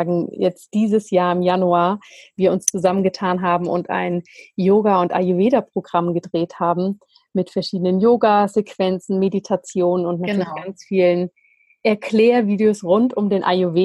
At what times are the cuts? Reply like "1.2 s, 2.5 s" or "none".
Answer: none